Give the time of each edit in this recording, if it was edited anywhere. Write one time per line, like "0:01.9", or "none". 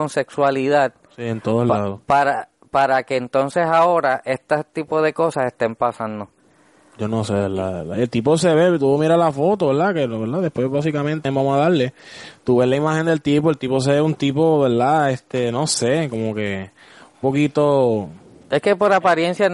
0:11.3